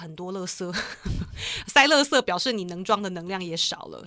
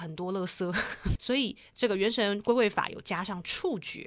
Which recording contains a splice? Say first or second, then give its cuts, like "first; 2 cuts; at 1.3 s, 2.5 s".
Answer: second; 1 cut; at 1.1 s